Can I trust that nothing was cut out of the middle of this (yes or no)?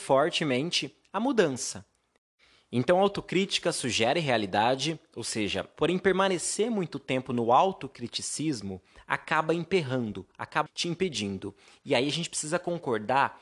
no